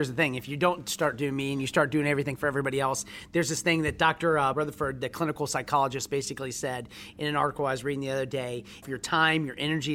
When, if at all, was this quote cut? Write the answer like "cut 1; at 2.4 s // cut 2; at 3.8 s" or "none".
cut 1; at 4.5 s // cut 2; at 8.8 s